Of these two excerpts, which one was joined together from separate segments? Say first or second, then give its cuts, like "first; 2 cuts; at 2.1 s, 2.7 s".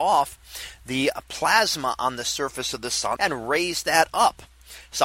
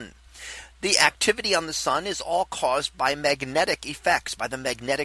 first; 1 cut; at 3.2 s